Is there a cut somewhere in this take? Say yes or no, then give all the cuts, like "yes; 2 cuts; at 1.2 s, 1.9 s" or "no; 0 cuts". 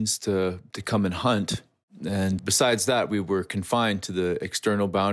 yes; 1 cut; at 2.4 s